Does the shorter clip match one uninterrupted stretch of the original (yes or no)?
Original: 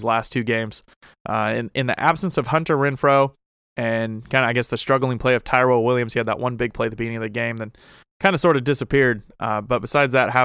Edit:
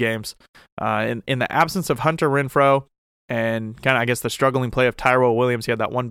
yes